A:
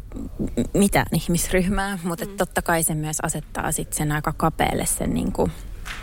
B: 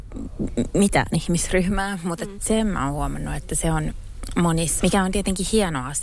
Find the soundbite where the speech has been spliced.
B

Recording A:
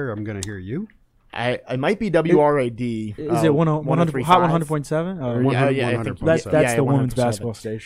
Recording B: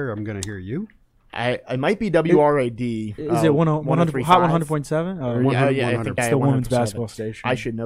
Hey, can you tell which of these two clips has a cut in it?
B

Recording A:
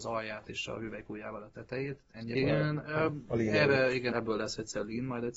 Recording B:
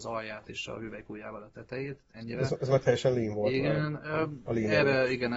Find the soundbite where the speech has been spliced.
A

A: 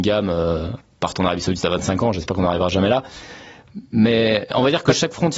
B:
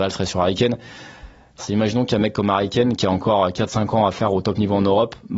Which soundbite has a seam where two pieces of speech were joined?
B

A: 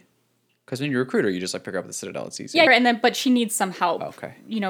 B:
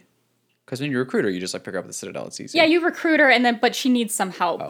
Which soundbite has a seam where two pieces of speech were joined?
A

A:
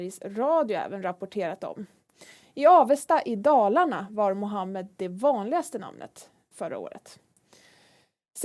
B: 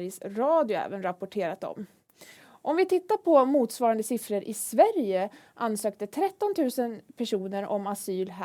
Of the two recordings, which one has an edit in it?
B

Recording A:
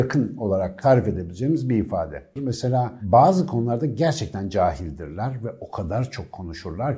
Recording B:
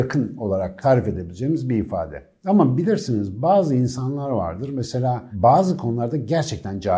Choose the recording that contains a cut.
A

